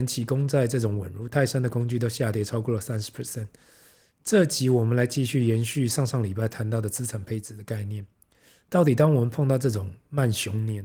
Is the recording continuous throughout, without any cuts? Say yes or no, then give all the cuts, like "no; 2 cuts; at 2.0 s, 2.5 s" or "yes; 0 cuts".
yes; 0 cuts